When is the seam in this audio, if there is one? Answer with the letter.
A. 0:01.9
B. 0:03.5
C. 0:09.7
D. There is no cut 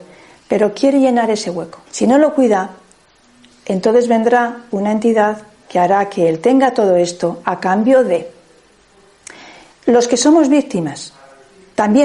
A